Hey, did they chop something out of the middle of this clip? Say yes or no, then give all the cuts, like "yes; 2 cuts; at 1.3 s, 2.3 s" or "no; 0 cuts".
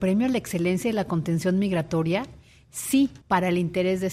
yes; 1 cut; at 3.2 s